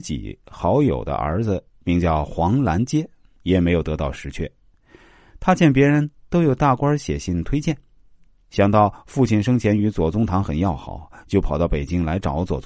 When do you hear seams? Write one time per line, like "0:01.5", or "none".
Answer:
0:03.4